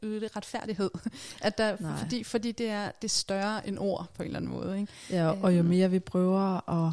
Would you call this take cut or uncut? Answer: uncut